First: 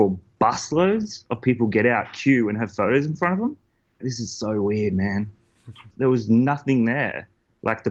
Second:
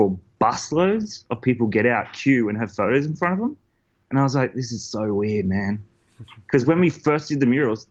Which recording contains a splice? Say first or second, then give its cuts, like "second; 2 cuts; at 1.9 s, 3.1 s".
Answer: first; 2 cuts; at 4.0 s, 5.9 s